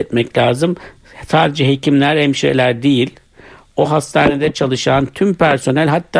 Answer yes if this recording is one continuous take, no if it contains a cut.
yes